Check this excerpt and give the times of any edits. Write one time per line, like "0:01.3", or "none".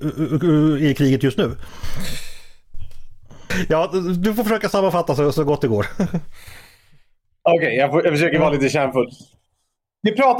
0:03.5